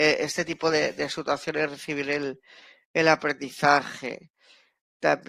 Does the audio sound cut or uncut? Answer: uncut